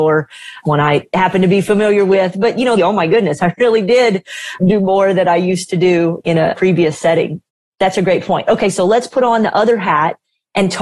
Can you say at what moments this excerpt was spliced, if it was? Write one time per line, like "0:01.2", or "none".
0:02.8